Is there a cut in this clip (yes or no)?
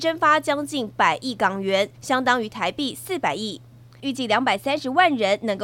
yes